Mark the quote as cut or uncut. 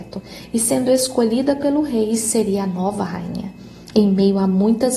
cut